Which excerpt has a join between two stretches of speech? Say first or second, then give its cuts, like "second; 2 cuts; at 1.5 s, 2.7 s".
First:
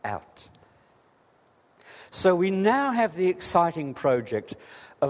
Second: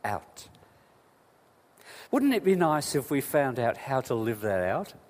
second; 1 cut; at 2.1 s